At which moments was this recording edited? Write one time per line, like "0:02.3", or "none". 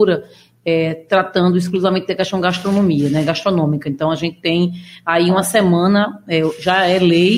none